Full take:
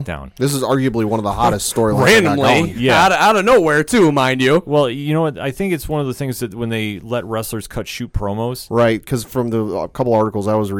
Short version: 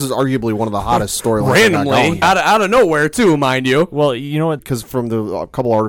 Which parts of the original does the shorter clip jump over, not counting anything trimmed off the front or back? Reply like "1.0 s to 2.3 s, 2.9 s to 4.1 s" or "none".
2.7 s to 3.0 s, 5.3 s to 9.0 s